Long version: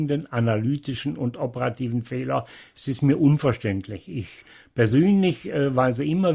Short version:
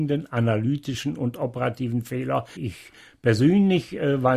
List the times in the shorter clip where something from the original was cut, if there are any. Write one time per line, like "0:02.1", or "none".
0:02.6